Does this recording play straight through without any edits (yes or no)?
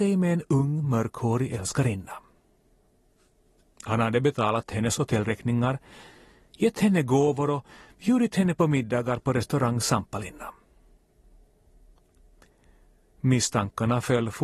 yes